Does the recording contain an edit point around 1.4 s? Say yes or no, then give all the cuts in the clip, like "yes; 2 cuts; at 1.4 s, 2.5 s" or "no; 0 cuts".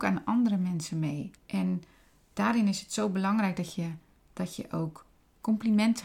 yes; 2 cuts; at 1.4 s, 4.2 s